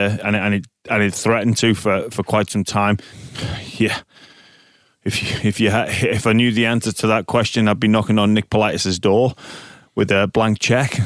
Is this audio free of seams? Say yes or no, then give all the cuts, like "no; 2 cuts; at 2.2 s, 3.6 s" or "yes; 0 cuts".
no; 1 cut; at 3.1 s